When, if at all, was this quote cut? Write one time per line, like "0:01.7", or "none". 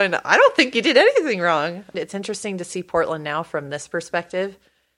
0:01.9